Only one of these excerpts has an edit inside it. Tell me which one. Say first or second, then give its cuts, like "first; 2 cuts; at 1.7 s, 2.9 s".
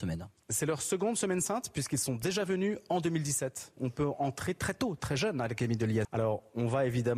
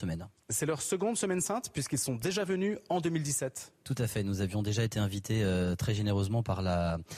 first; 2 cuts; at 3.8 s, 6.0 s